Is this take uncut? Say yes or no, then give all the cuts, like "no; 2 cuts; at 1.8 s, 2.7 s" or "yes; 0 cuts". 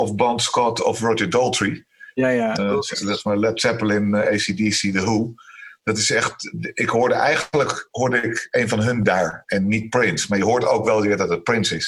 no; 1 cut; at 2.6 s